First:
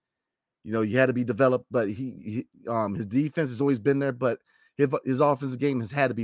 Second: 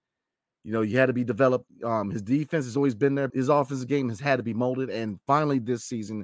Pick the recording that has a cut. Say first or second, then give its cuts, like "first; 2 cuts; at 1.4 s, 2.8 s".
second; 2 cuts; at 1.7 s, 3.3 s